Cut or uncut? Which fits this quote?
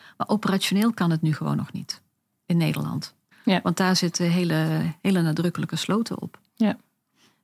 cut